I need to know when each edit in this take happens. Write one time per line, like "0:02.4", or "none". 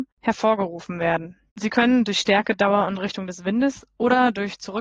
0:01.5

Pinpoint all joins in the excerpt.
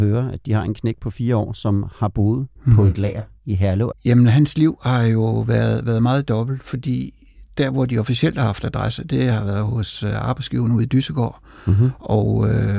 0:03.9

